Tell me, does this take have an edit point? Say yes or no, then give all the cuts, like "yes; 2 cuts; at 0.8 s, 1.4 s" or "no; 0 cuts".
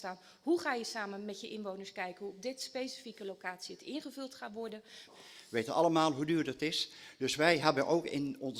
yes; 1 cut; at 5.1 s